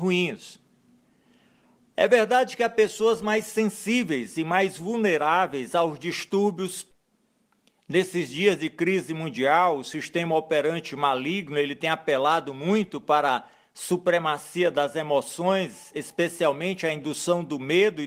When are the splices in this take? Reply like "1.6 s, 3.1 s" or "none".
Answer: none

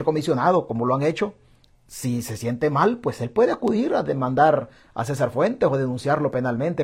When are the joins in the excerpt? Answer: none

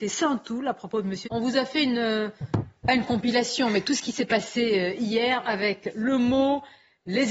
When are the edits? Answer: 1.2 s

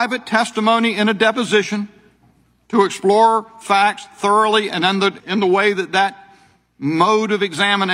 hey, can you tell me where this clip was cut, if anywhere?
5.2 s

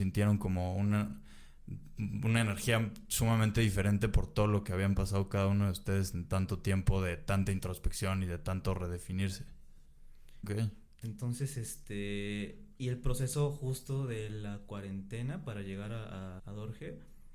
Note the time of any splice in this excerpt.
10.4 s, 16.4 s

